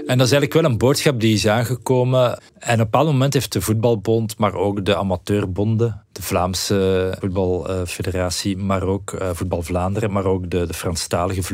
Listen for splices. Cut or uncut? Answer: cut